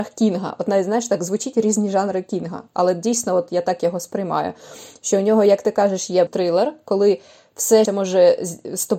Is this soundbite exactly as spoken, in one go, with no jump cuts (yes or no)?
no